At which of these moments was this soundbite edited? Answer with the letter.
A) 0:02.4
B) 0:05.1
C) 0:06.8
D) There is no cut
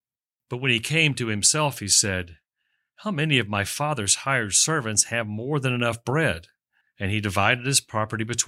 C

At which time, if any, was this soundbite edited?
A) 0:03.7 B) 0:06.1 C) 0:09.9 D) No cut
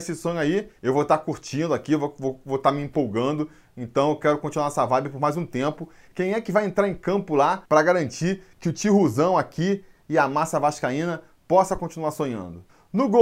B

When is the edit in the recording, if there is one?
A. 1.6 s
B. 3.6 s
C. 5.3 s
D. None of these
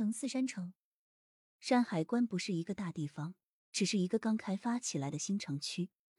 A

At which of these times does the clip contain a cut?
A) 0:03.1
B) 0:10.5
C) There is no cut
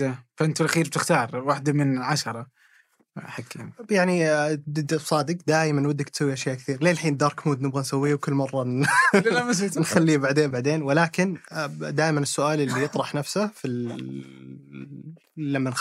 B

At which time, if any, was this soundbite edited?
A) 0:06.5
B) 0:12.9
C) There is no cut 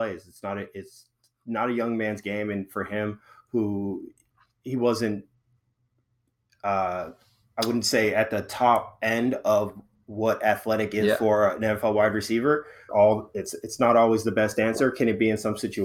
B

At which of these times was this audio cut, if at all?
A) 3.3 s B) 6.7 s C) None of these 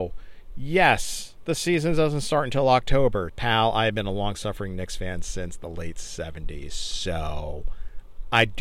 A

